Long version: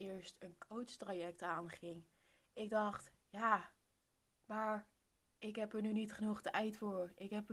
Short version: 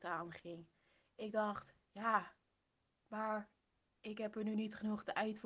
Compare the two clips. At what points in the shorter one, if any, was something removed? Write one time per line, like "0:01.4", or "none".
none